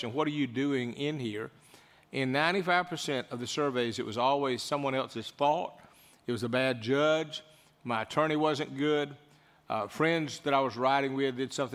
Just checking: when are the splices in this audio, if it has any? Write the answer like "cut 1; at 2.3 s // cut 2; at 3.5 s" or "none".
none